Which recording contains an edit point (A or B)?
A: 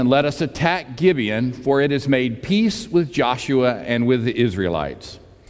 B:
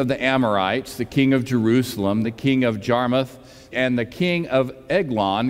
B